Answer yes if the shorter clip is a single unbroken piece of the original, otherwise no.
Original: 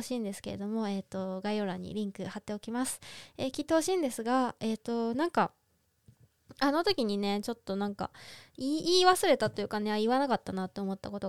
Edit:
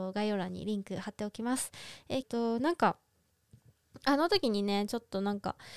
no